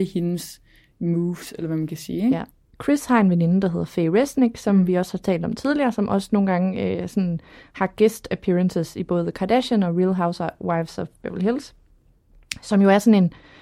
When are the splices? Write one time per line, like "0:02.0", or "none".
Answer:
none